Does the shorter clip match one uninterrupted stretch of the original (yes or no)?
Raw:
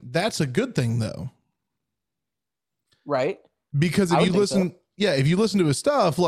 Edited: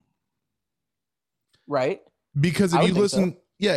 yes